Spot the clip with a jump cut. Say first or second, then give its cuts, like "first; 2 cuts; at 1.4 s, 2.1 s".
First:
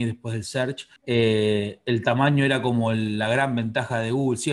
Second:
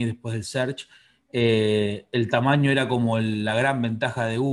first; 1 cut; at 1.0 s